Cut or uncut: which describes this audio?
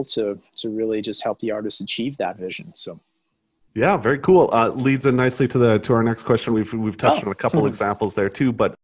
uncut